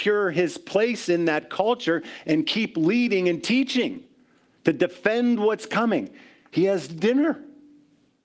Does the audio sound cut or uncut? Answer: uncut